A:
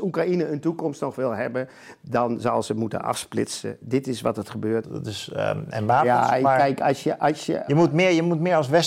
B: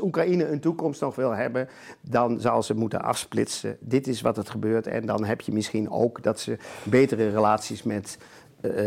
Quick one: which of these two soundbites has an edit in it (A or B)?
A